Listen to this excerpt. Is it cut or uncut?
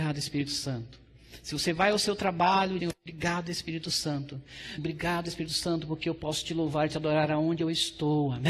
cut